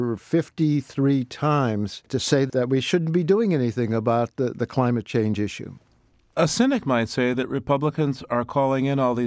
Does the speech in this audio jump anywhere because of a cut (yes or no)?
no